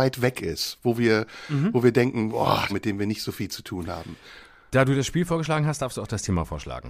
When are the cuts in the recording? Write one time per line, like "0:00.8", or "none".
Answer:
0:02.7